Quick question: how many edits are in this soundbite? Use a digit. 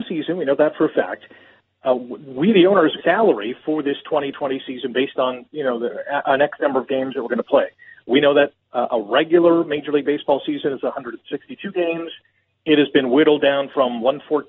1